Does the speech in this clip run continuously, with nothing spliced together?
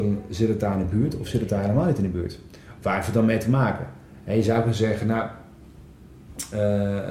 no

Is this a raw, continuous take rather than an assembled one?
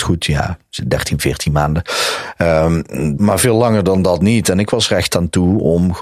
no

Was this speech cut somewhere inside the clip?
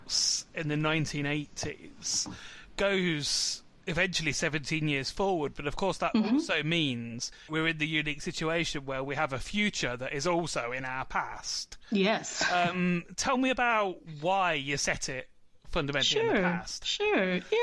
no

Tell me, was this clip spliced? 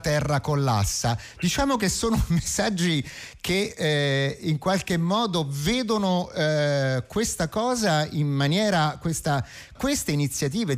yes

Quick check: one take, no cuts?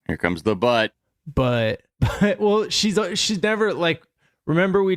yes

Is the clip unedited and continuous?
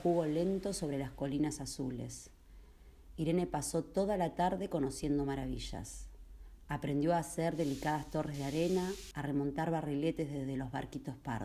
no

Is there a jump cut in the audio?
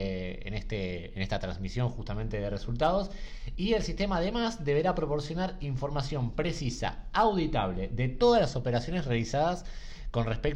no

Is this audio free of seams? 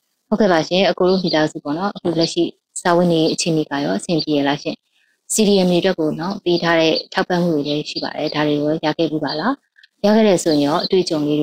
yes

